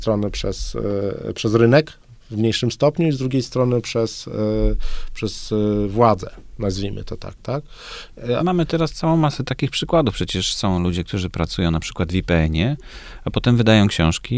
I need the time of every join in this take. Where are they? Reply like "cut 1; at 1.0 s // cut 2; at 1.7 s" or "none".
cut 1; at 8.4 s